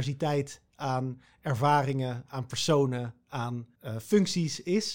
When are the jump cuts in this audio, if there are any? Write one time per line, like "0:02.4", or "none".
0:03.7